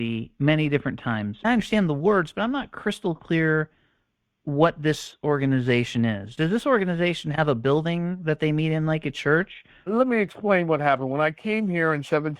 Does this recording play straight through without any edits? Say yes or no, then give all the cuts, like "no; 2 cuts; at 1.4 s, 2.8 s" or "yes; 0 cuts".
yes; 0 cuts